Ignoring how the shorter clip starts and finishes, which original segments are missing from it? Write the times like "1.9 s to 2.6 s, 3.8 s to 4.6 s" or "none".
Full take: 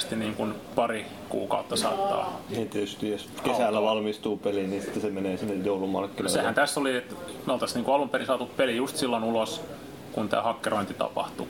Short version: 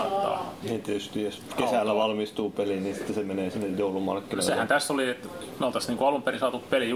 none